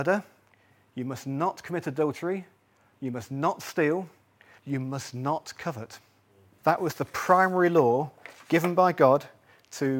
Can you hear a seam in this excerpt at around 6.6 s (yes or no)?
yes